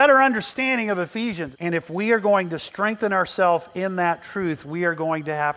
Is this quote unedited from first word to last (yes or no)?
no